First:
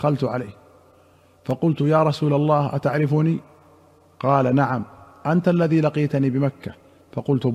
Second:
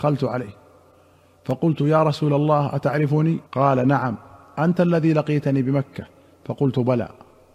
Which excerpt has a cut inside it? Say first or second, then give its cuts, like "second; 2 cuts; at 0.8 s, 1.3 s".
second; 1 cut; at 3.5 s